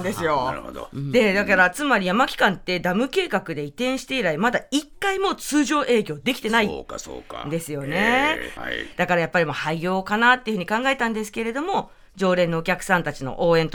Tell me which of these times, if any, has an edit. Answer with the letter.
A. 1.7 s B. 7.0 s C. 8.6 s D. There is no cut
C